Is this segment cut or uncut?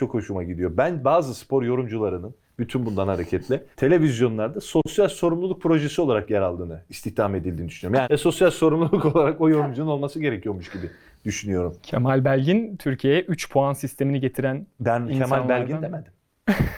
cut